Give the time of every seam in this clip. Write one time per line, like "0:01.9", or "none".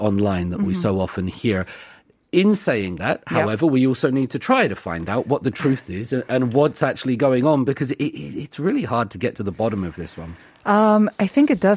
none